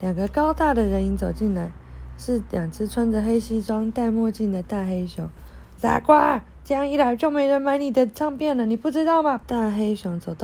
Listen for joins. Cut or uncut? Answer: cut